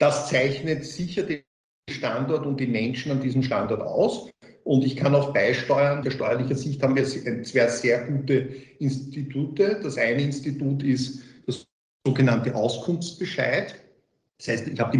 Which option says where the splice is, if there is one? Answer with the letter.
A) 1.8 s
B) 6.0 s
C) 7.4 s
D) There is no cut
B